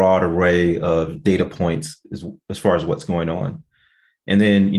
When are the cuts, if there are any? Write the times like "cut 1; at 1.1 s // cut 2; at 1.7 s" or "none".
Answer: none